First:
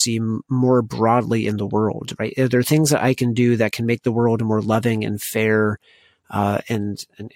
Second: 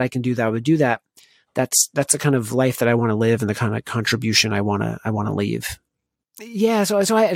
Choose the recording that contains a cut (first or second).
second